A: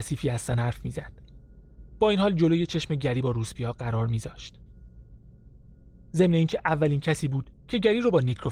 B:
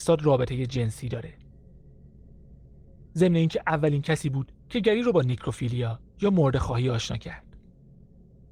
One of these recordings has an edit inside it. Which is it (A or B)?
B